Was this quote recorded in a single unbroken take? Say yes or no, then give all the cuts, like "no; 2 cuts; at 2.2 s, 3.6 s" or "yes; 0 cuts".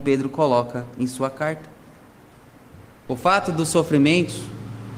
no; 1 cut; at 3.1 s